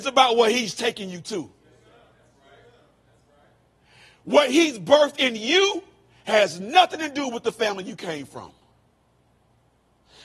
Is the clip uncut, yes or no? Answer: yes